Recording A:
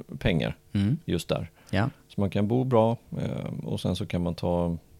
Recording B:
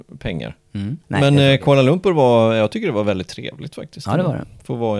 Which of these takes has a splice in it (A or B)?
B